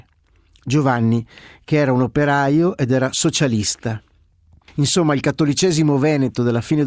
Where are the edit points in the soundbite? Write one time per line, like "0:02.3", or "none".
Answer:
0:04.6

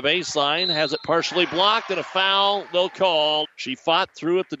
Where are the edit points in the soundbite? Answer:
0:03.4

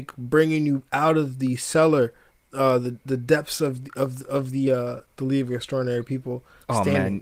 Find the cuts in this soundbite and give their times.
none

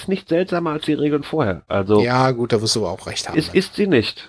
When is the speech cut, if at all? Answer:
none

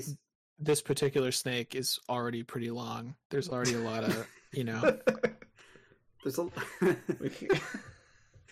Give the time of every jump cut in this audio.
none

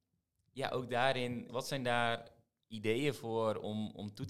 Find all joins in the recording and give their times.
0:01.5

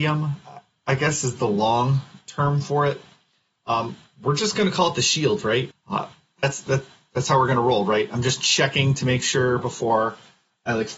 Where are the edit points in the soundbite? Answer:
0:05.7

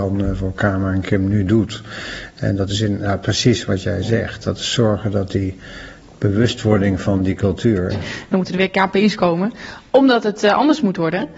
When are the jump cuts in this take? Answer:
0:07.9

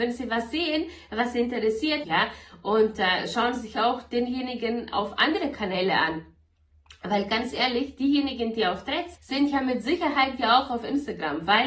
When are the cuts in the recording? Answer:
0:02.0
0:09.2

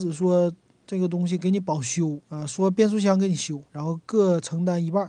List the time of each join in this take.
0:02.2
0:03.7

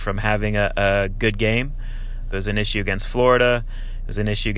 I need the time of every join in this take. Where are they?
0:02.3

